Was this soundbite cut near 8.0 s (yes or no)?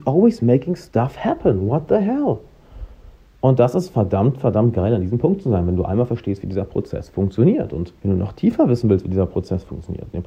yes